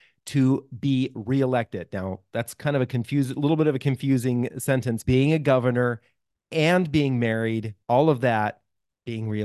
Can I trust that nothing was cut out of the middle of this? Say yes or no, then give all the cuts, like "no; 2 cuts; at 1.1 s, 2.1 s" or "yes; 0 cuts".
no; 2 cuts; at 5.0 s, 7.8 s